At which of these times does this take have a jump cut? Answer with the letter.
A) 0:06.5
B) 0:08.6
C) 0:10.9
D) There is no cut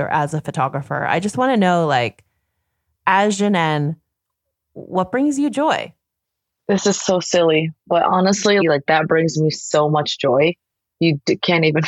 B